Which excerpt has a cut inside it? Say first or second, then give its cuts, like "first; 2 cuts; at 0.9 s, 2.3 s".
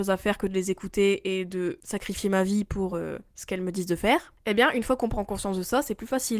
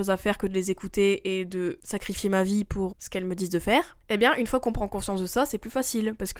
second; 1 cut; at 2.9 s